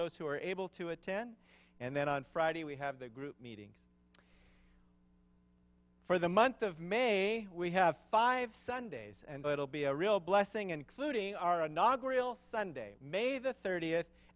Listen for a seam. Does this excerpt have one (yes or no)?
yes